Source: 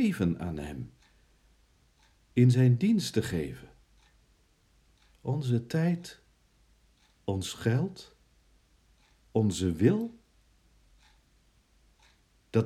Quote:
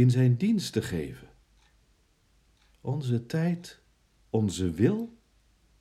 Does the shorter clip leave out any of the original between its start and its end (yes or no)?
yes